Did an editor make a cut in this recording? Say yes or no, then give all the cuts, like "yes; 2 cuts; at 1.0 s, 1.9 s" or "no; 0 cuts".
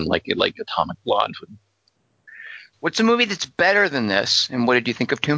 yes; 1 cut; at 2.7 s